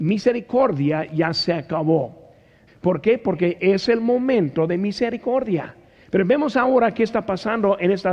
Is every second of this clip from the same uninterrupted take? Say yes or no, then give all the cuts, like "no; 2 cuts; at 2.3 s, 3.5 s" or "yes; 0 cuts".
no; 1 cut; at 2.7 s